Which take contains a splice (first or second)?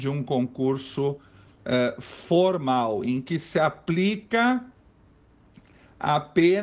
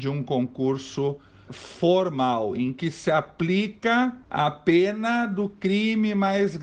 second